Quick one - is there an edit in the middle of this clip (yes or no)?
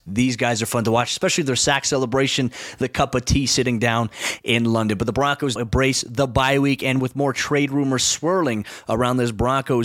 yes